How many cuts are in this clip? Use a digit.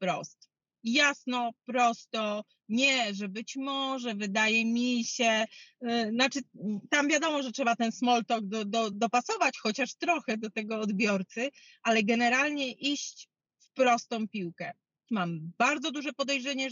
2